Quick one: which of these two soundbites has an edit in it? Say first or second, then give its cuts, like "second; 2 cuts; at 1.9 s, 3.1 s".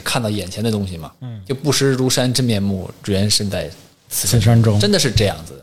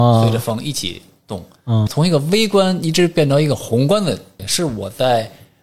second; 2 cuts; at 1.9 s, 4.4 s